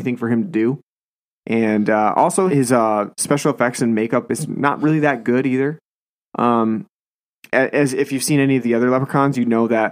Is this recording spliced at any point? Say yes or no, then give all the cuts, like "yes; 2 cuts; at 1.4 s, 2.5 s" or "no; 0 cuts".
yes; 1 cut; at 2.5 s